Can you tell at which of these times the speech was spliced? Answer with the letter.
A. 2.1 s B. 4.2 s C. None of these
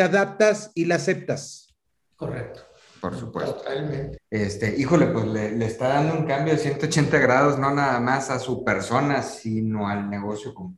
B